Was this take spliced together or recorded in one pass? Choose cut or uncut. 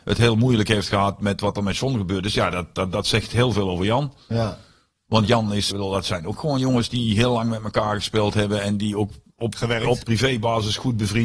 cut